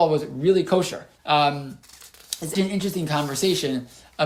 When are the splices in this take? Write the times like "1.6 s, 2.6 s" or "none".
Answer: 1.2 s, 2.6 s

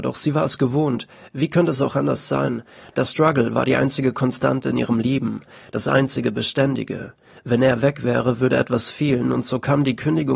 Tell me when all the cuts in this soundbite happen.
none

